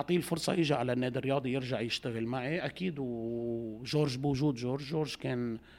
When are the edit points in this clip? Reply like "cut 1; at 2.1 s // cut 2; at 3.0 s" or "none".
none